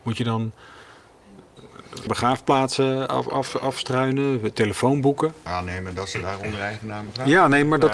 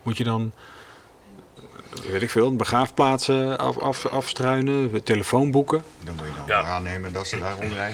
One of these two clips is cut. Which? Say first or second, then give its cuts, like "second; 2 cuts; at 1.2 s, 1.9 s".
first; 2 cuts; at 2.1 s, 5.5 s